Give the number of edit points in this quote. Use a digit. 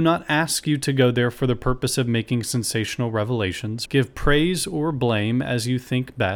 1